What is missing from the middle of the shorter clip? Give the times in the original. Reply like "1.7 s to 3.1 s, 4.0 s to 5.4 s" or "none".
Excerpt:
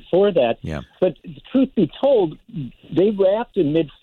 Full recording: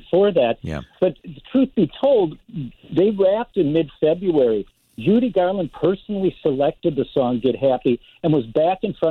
none